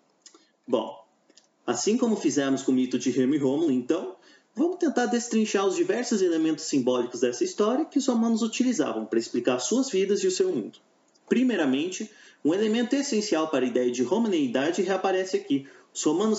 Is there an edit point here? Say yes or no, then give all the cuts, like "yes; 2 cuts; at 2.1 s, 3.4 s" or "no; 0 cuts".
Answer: no; 0 cuts